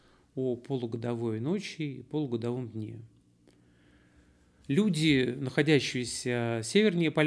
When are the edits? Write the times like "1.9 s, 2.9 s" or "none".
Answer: 4.6 s